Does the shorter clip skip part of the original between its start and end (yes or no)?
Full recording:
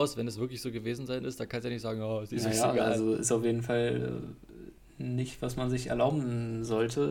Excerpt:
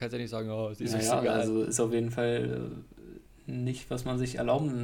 no